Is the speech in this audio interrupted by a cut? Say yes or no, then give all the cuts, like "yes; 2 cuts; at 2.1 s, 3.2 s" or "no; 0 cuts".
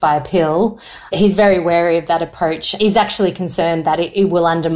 no; 0 cuts